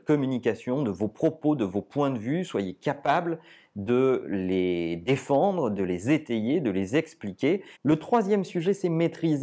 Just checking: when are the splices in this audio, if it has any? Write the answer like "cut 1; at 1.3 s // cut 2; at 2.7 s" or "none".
cut 1; at 7.8 s